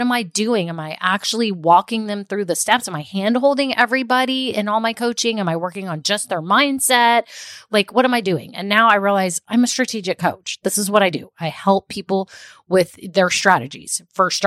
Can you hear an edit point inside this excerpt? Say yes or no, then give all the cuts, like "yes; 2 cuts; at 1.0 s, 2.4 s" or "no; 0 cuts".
no; 0 cuts